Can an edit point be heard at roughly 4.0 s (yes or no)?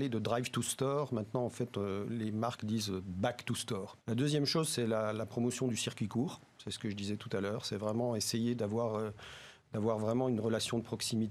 yes